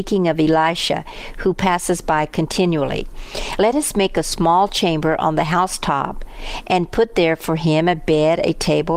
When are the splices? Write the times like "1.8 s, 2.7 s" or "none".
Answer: none